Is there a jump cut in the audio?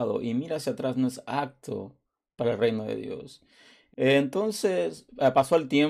yes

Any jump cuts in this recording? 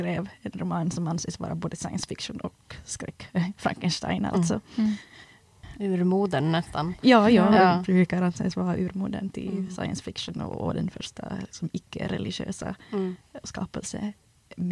no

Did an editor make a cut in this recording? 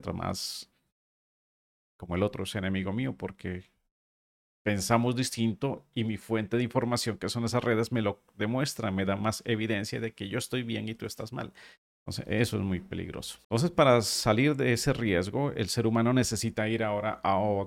yes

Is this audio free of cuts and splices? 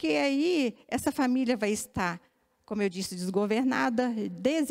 yes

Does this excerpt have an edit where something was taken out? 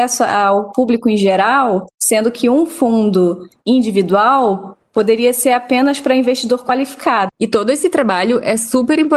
yes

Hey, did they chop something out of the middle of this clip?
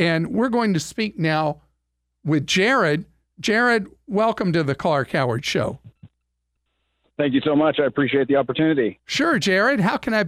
no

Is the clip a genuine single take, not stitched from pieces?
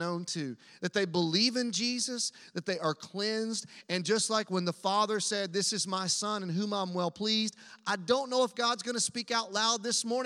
no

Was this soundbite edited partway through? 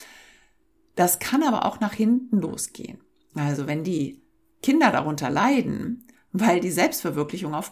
no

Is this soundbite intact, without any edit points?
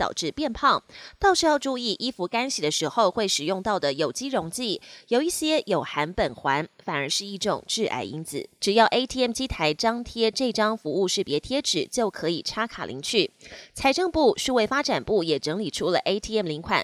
no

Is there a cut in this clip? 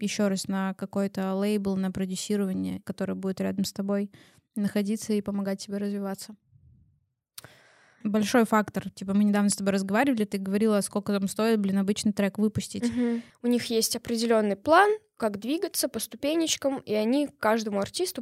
yes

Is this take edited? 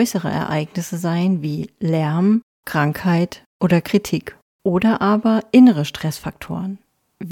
yes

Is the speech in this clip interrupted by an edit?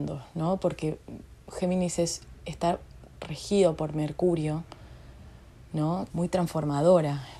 yes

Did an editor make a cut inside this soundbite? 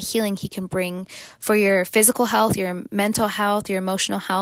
no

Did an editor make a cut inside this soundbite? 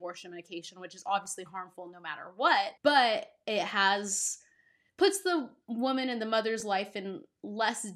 yes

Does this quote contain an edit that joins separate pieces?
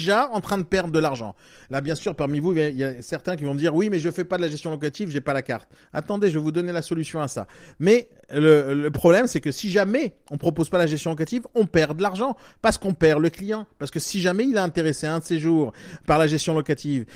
no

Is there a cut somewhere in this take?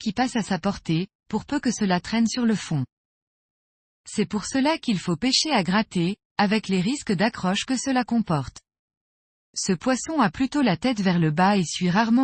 no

